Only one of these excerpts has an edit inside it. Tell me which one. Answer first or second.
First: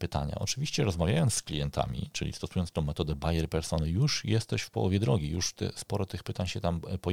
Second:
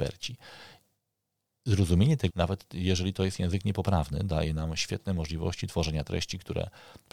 second